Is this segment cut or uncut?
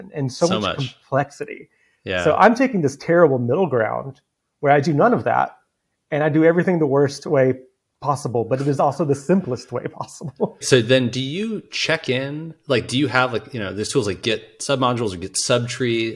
cut